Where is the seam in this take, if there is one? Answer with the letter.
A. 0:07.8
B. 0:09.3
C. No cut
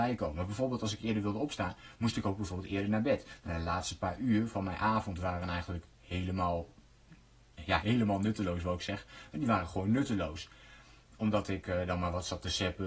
A